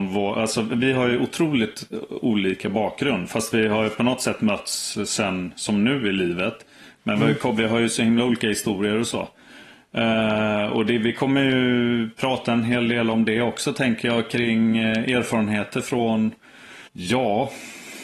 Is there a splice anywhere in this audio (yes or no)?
yes